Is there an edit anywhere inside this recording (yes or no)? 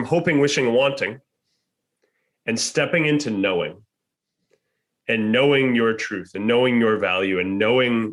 no